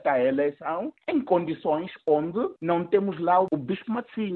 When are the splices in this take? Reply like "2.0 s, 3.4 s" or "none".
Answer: none